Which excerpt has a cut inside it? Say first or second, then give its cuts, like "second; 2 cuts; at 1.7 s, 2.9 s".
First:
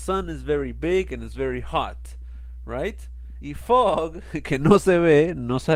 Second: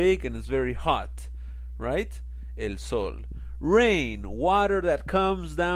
first; 1 cut; at 3.4 s